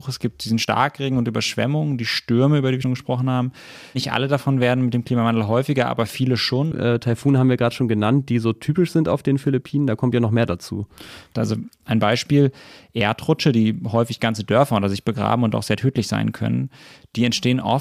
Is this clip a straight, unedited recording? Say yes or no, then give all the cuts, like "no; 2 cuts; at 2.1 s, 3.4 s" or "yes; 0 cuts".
no; 3 cuts; at 2.8 s, 6.7 s, 11.3 s